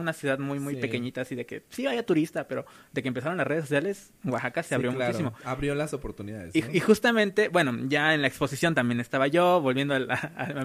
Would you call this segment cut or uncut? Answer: uncut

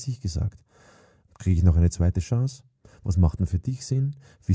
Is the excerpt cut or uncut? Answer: cut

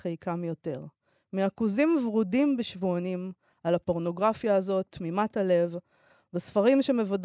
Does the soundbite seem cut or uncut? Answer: uncut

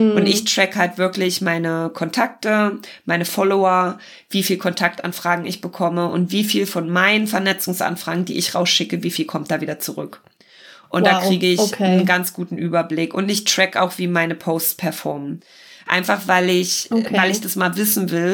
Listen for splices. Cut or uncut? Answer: uncut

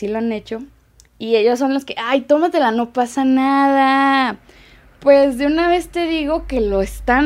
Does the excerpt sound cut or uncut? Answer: uncut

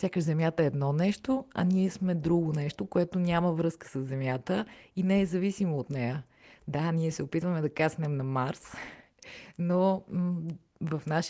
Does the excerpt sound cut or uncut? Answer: uncut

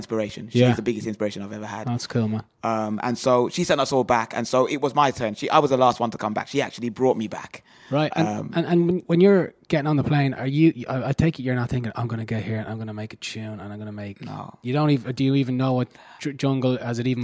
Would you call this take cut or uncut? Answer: uncut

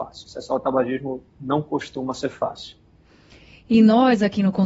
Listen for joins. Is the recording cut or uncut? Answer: uncut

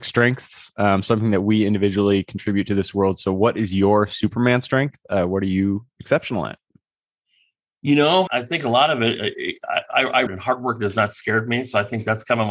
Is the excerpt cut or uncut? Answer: cut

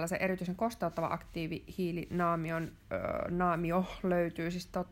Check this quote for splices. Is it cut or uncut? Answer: uncut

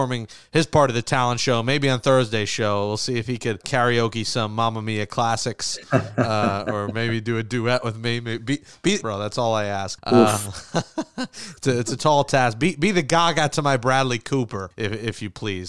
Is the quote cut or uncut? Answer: cut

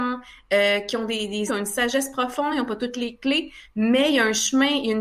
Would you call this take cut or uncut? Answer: cut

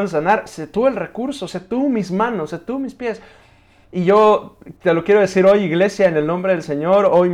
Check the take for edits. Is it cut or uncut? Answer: uncut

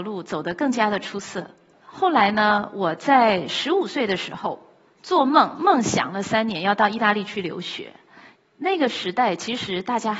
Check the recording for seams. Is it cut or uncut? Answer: cut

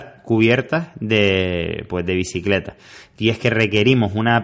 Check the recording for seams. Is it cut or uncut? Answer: uncut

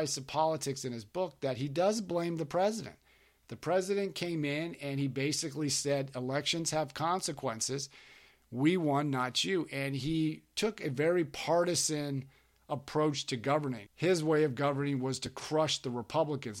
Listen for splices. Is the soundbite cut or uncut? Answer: cut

